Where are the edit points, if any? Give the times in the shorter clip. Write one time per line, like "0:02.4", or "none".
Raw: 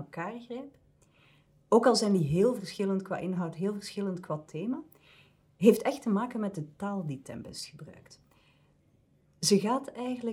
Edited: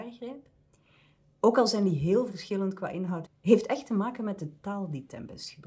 0:03.3